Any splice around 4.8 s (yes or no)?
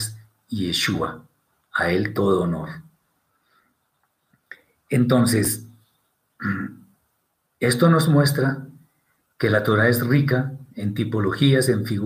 no